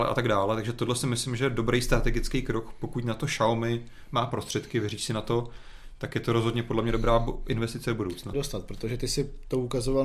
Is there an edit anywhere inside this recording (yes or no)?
yes